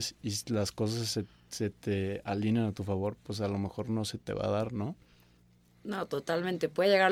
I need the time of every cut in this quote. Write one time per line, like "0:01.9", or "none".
none